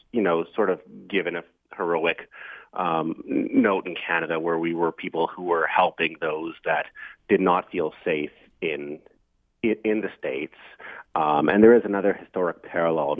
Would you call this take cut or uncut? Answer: uncut